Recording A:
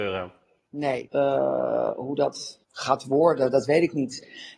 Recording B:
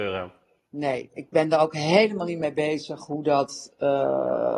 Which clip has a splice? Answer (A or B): A